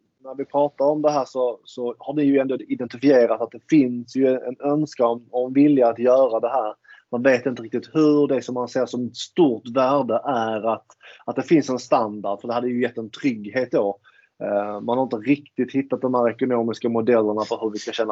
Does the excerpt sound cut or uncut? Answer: uncut